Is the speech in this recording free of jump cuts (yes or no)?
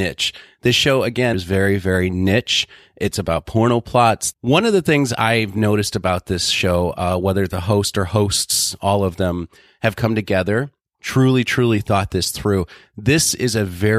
no